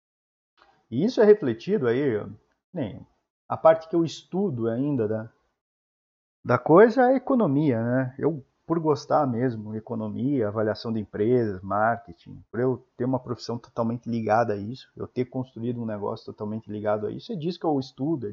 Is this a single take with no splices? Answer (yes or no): yes